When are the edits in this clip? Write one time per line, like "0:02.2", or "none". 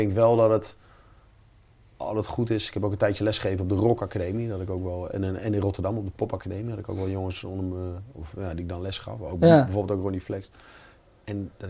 none